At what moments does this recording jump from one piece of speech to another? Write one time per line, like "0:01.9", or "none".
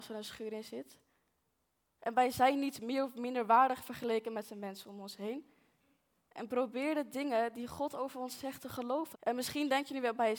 0:06.3
0:09.1